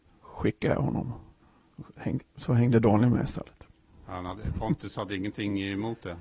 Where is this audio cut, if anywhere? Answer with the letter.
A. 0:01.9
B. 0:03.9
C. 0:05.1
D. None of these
D